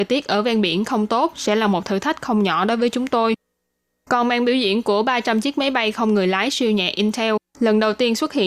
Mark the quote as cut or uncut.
uncut